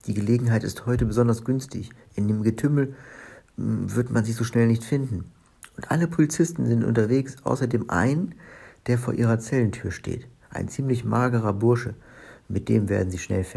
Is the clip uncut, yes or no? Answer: yes